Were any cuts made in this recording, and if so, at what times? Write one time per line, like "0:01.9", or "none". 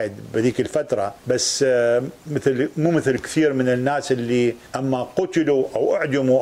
0:01.2
0:04.7